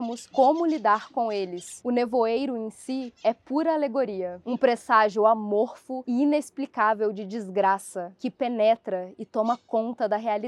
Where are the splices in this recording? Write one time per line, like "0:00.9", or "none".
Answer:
0:01.8

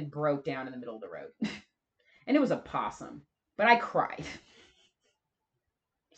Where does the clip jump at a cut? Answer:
0:03.5

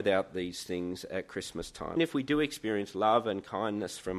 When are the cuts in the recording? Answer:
0:02.0

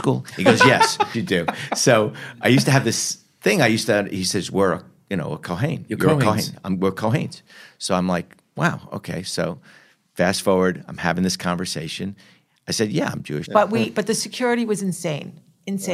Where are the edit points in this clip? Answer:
0:01.1
0:13.4

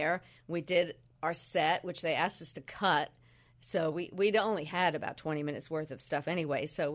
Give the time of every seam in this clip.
none

